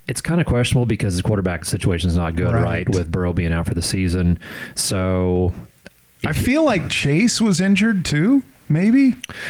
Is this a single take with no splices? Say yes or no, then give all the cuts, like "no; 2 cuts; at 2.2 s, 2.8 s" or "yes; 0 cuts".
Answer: yes; 0 cuts